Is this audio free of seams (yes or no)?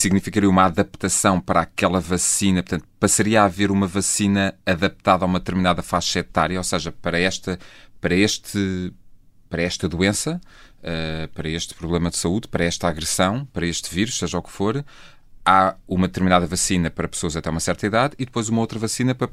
yes